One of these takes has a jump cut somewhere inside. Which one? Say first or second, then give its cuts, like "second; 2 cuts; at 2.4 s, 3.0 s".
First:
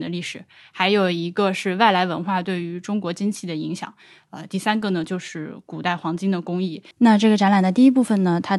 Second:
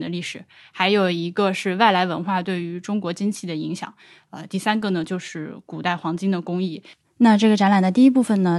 first; 1 cut; at 6.9 s